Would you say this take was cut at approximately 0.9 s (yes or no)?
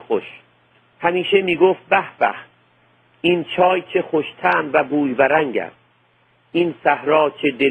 yes